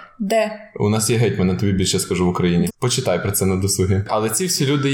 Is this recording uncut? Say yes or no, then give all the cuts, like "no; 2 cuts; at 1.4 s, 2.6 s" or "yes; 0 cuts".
no; 1 cut; at 2.7 s